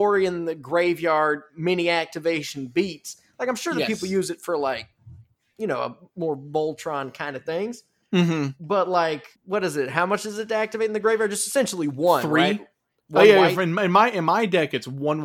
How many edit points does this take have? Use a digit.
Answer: 1